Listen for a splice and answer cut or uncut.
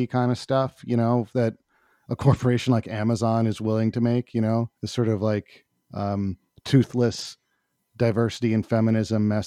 cut